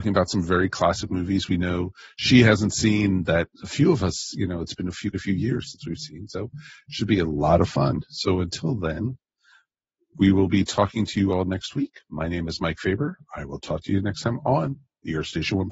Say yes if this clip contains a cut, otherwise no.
yes